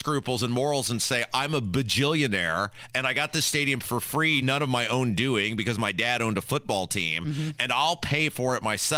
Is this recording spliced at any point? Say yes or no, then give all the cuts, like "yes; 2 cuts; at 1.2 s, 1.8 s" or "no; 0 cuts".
yes; 1 cut; at 4.4 s